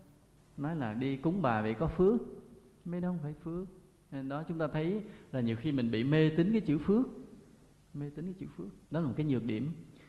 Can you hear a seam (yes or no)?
yes